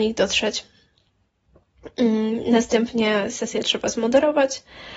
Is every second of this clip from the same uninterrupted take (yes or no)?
yes